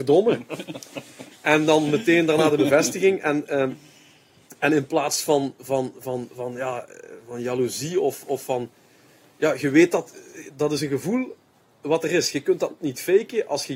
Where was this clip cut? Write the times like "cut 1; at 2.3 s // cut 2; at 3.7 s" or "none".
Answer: none